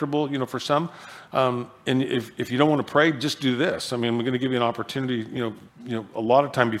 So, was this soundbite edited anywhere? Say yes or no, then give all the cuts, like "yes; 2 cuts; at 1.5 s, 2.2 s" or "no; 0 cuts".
yes; 1 cut; at 5.7 s